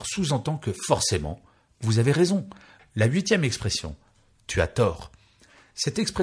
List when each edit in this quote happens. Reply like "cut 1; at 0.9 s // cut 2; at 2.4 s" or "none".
cut 1; at 2.8 s